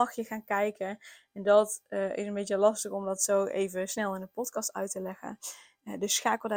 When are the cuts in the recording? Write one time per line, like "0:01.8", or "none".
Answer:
none